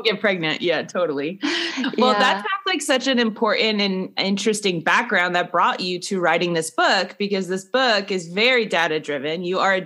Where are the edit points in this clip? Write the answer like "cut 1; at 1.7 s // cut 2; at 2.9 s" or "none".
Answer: none